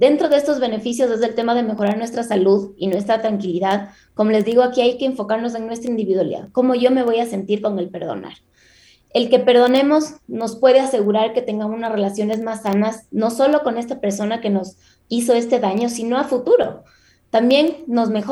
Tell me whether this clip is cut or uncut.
uncut